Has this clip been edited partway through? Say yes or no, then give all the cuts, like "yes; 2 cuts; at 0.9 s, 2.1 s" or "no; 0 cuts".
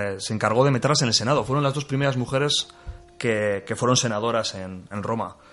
no; 0 cuts